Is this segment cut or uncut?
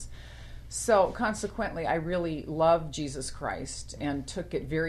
uncut